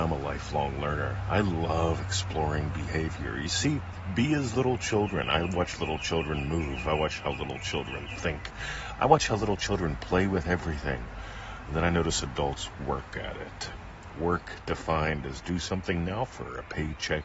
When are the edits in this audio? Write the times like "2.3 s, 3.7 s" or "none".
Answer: none